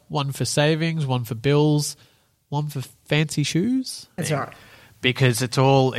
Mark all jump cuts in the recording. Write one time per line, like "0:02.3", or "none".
0:04.2